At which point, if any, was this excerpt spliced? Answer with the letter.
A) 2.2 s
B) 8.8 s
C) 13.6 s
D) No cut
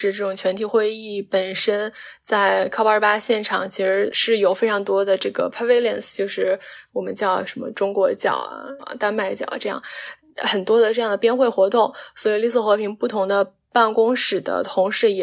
B